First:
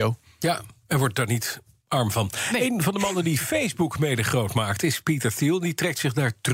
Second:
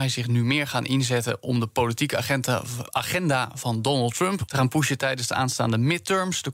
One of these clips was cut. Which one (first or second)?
second